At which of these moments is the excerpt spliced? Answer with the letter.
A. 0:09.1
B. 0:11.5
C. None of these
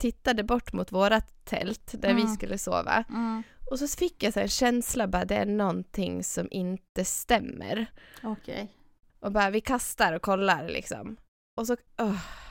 A